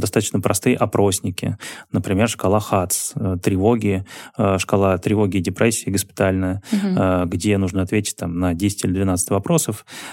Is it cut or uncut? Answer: uncut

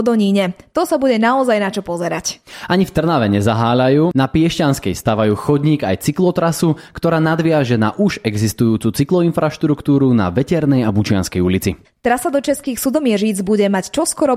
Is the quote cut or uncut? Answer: cut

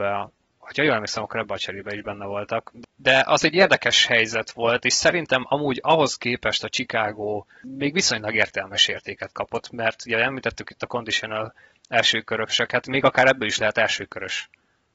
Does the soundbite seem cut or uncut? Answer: uncut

